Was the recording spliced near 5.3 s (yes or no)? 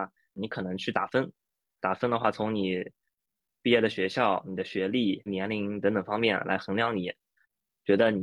yes